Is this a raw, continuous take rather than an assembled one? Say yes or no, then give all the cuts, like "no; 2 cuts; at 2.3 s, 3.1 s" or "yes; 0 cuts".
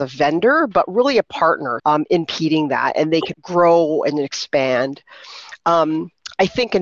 no; 2 cuts; at 1.8 s, 3.3 s